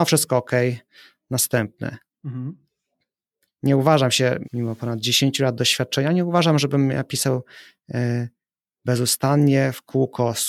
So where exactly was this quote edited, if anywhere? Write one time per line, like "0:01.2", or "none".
0:04.4